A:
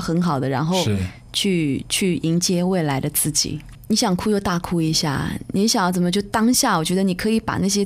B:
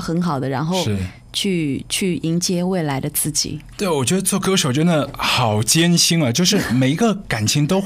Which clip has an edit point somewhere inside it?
A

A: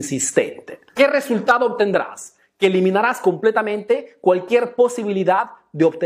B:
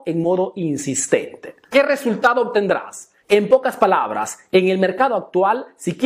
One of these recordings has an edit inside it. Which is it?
B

